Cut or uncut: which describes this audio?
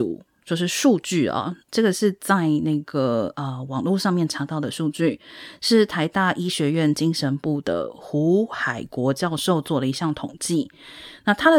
uncut